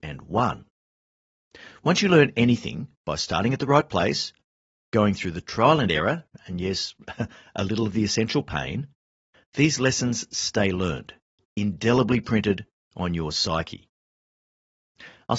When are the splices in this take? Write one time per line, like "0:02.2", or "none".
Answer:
none